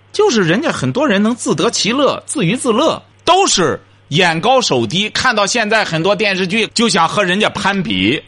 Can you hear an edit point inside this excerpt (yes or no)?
yes